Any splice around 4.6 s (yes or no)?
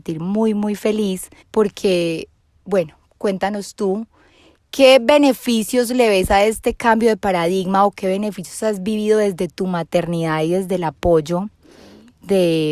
no